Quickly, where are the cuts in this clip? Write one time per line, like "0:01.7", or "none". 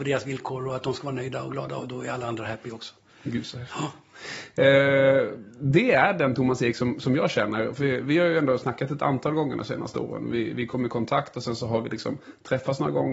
none